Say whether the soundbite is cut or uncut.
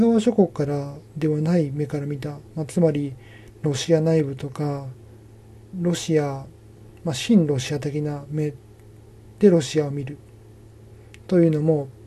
cut